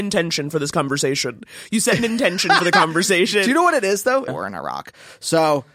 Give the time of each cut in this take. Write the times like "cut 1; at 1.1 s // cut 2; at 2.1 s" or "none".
cut 1; at 4.3 s